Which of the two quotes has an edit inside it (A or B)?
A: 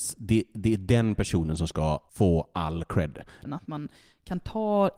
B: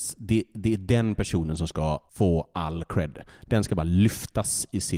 A